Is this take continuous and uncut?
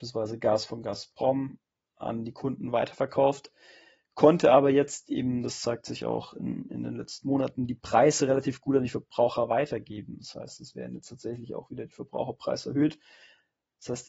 yes; 0 cuts

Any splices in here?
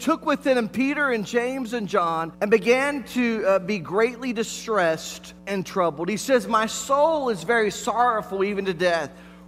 yes; 2 cuts; at 2.3 s, 5.4 s

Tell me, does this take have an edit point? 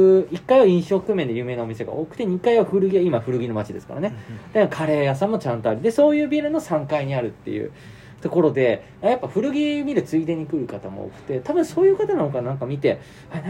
no; 0 cuts

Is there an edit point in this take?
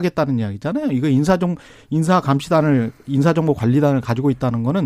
no; 0 cuts

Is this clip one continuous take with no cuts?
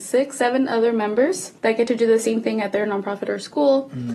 no; 1 cut; at 1.6 s

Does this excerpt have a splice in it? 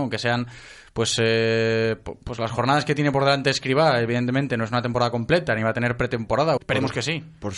yes; 1 cut; at 6.6 s

